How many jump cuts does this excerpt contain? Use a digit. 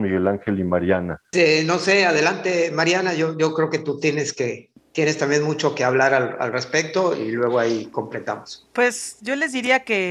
1